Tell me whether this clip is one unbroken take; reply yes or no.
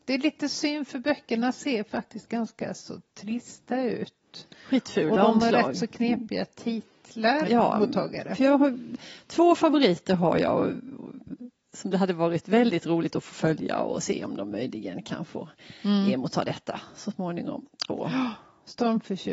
no